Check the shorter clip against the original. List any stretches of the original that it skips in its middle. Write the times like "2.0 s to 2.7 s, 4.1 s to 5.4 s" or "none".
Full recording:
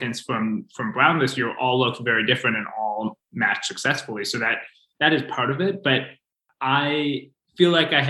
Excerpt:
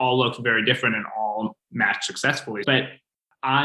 4.2 s to 5.8 s

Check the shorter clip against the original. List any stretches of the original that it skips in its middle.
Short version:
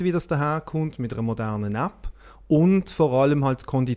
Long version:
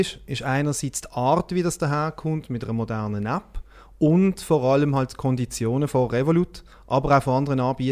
none

